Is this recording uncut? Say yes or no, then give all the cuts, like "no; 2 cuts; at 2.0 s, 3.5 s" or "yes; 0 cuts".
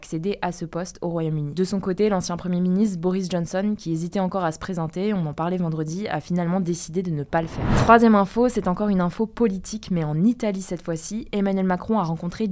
yes; 0 cuts